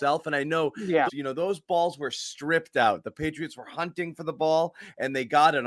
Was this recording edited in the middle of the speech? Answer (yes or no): yes